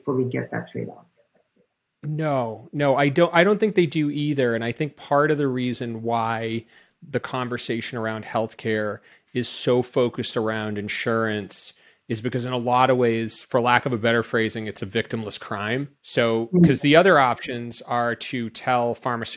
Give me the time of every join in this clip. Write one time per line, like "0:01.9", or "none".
0:16.0